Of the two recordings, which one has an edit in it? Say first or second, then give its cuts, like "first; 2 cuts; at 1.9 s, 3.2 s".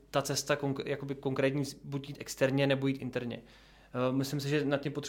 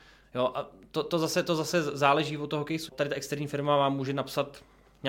second; 1 cut; at 2.9 s